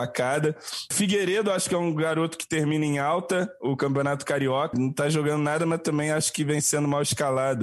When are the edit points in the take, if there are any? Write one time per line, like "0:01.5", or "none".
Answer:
0:00.9
0:04.7